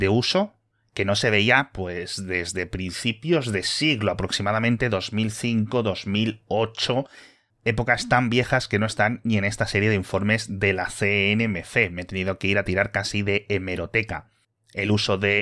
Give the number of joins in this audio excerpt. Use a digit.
0